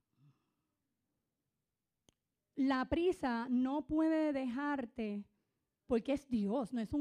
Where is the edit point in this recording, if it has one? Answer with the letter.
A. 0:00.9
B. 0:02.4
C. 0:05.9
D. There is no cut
C